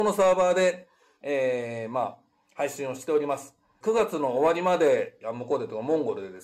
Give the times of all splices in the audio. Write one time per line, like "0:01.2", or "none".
0:03.8
0:05.2